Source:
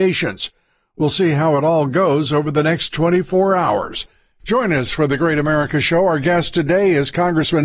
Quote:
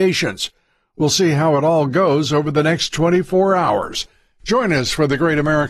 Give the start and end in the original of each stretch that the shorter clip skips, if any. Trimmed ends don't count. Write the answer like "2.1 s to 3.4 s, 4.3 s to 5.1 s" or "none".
none